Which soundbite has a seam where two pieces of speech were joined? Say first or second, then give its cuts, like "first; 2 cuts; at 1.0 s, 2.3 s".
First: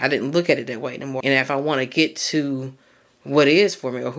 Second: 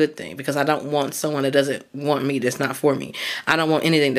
first; 1 cut; at 1.2 s